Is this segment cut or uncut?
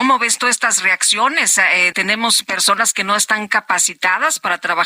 cut